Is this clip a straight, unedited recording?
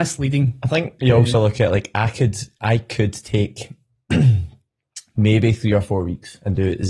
yes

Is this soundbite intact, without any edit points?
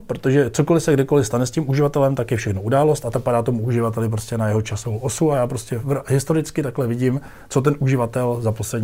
yes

